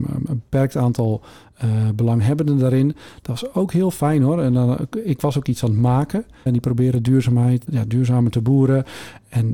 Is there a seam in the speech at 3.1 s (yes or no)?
no